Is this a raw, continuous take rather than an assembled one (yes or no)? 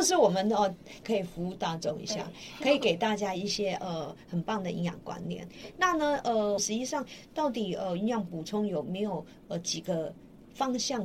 no